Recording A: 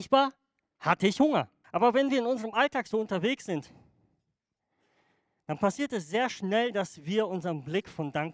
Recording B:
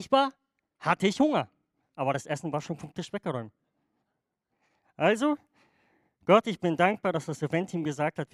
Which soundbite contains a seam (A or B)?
A